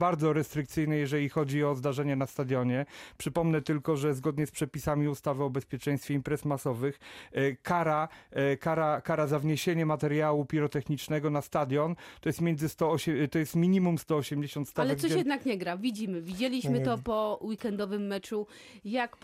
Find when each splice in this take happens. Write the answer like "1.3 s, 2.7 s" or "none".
none